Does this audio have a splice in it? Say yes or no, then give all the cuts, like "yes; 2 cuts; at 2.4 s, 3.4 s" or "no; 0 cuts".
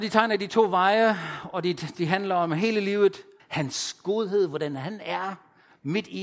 yes; 1 cut; at 3.4 s